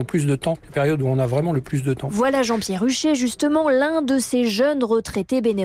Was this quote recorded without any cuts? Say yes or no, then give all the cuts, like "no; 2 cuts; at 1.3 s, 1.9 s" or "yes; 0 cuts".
yes; 0 cuts